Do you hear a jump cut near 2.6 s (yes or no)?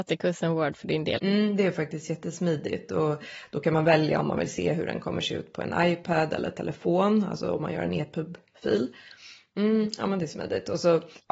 no